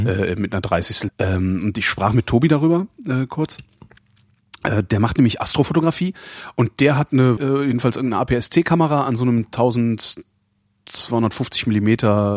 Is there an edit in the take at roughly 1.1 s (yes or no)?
yes